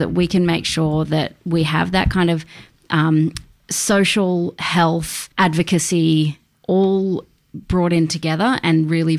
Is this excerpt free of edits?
no; 1 cut; at 5.3 s

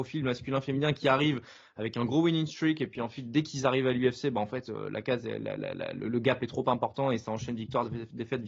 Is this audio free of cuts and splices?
yes; 0 cuts

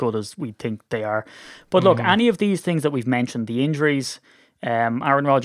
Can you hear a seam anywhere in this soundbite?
no; 0 cuts

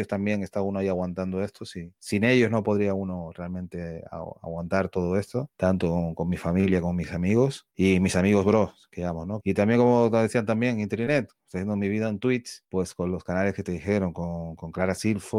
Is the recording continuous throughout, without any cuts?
no; 1 cut; at 9.4 s

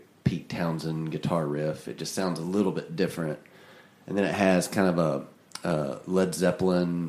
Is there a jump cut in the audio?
no; 0 cuts

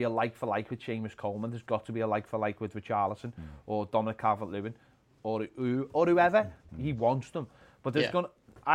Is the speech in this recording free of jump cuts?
no; 1 cut; at 6.7 s

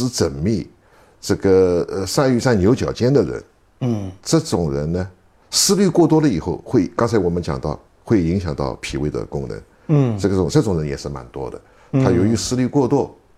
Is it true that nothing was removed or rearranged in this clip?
yes; 0 cuts

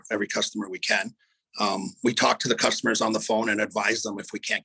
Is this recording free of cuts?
yes; 0 cuts

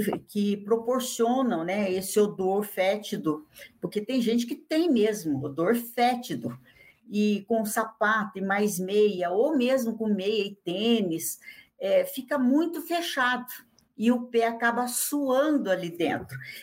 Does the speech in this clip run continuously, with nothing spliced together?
yes; 0 cuts

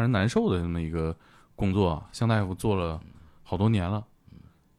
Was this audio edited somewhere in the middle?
no; 0 cuts

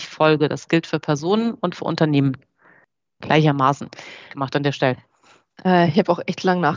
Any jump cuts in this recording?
yes; 1 cut; at 4.3 s

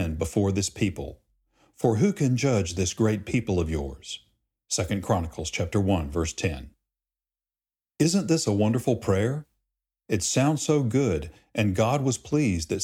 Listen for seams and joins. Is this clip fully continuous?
yes; 0 cuts

